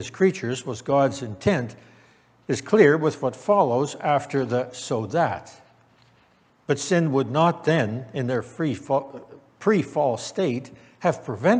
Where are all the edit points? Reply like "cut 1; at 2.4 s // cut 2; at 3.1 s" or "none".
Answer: cut 1; at 6.5 s